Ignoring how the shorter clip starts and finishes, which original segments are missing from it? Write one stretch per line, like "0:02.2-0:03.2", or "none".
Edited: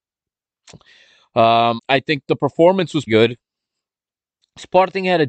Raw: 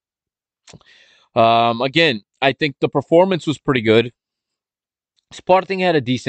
0:01.8-0:02.3
0:03.6-0:03.8